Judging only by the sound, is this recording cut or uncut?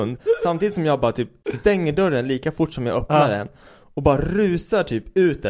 uncut